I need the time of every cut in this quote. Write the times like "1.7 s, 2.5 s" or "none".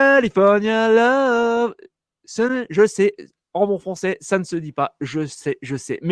none